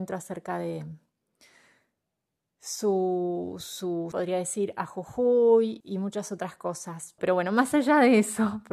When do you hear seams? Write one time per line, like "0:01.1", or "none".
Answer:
0:04.1
0:05.8
0:07.2